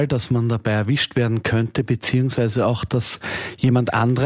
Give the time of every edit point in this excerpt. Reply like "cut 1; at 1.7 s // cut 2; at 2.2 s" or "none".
none